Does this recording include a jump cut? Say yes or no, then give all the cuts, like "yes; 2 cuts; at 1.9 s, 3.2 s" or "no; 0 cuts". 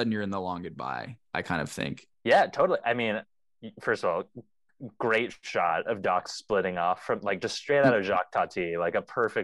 yes; 1 cut; at 2.1 s